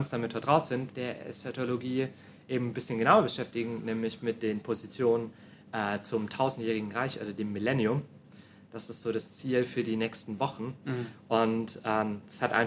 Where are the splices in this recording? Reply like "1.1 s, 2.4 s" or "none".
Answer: 0.9 s